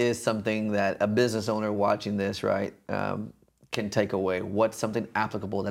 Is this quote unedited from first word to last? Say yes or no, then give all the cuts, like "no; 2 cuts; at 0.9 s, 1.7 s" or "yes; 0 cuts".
yes; 0 cuts